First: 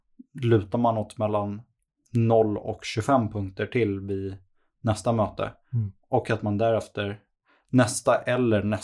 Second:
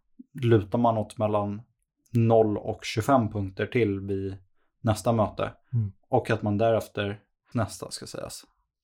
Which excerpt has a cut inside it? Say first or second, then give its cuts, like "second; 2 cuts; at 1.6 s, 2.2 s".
second; 1 cut; at 7.5 s